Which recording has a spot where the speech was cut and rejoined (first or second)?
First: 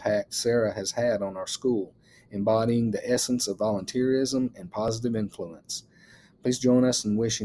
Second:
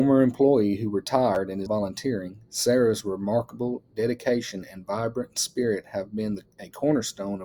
second